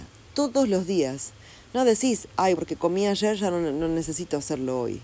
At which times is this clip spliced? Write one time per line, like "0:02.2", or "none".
0:02.5